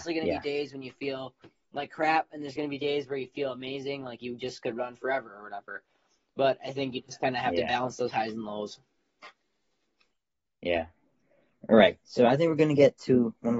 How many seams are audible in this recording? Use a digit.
0